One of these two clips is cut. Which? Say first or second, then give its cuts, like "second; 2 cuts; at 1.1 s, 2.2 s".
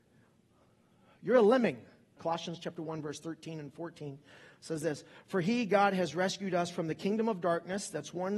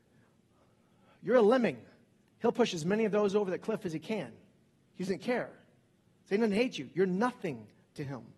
first; 1 cut; at 2.2 s